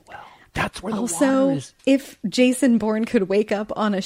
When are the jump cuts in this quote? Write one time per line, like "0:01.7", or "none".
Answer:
0:01.8